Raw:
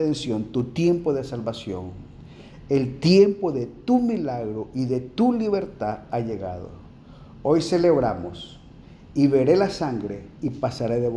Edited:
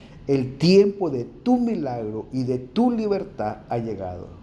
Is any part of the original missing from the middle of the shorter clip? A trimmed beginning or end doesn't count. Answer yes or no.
no